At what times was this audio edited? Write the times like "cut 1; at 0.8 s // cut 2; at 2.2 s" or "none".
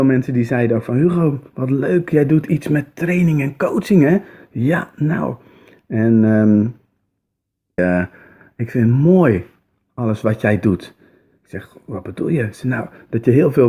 cut 1; at 7.8 s